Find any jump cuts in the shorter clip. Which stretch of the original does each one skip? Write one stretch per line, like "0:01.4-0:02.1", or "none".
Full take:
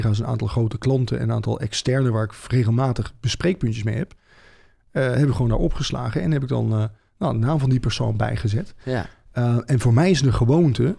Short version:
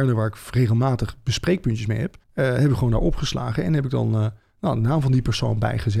0:04.2-0:04.8